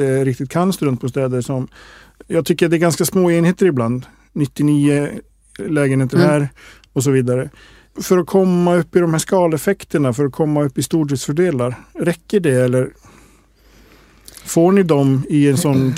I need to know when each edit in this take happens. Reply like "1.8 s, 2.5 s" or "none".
none